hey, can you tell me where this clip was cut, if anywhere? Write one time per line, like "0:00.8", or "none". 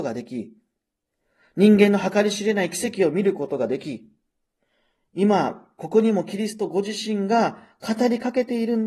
none

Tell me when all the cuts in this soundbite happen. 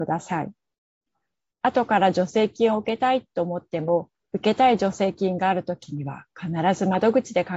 0:01.5
0:04.2

